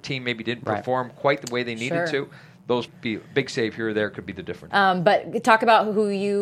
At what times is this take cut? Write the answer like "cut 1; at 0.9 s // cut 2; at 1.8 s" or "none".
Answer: cut 1; at 2.9 s // cut 2; at 4.7 s